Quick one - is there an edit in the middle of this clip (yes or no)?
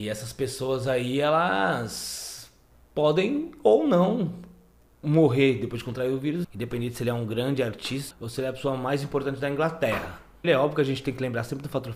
yes